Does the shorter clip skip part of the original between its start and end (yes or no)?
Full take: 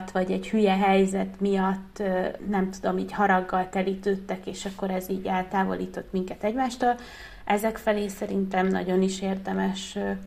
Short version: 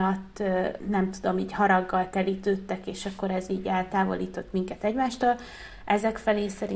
no